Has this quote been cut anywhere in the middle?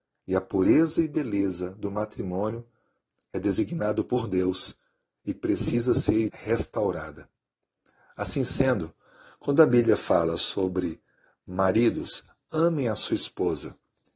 yes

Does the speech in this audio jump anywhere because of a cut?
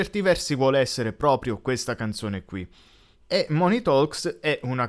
yes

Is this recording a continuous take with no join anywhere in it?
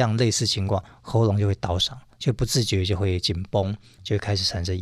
yes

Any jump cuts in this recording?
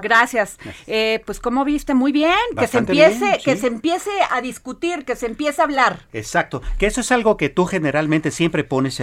no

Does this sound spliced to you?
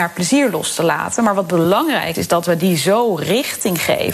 yes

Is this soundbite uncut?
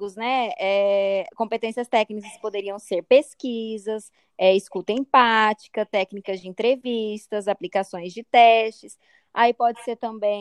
yes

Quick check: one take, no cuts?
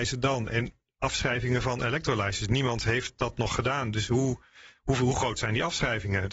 yes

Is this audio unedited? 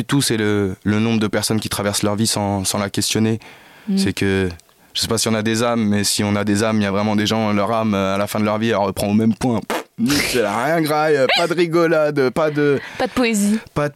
no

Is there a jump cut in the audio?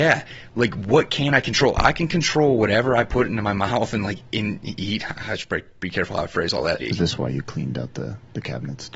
yes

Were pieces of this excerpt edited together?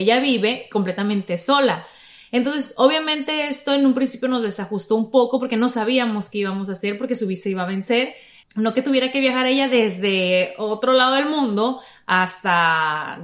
yes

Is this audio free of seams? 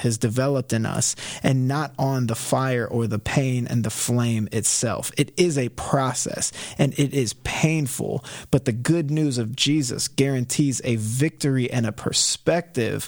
yes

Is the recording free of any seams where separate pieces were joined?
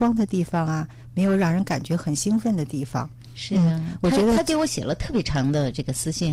yes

